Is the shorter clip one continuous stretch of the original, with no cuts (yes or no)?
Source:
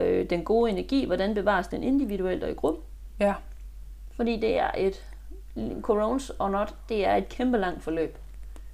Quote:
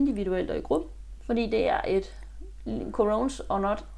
no